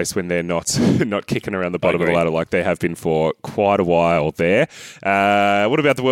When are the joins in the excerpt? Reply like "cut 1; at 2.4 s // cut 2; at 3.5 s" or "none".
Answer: none